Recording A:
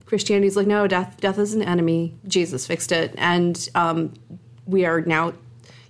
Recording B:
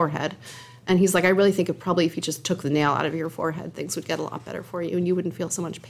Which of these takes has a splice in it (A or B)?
A